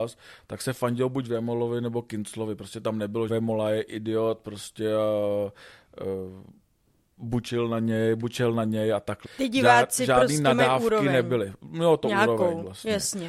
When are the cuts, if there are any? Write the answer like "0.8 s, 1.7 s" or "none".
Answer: 3.3 s, 9.2 s